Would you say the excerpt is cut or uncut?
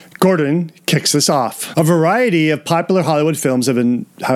cut